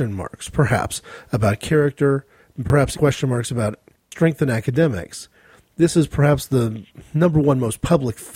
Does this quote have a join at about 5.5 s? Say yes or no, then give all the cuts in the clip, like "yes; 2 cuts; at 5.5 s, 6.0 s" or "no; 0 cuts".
no; 1 cut; at 2.9 s